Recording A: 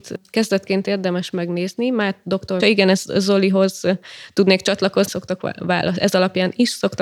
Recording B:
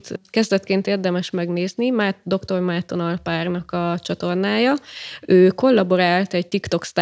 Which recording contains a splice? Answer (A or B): A